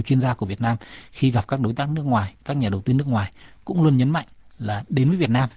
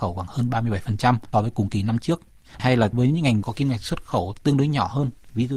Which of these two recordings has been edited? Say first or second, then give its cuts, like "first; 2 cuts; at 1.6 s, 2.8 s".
second; 1 cut; at 1.3 s